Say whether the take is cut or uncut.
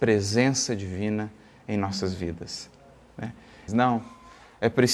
cut